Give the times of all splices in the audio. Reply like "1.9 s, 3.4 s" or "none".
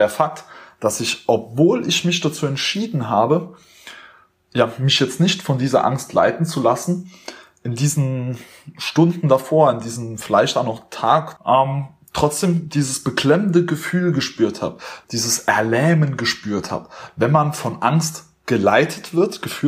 11.4 s, 15.0 s

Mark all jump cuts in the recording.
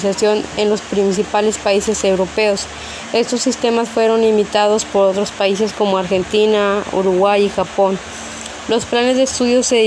none

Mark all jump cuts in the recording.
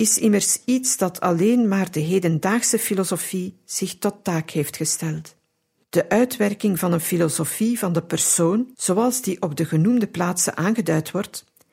5.8 s, 8.7 s

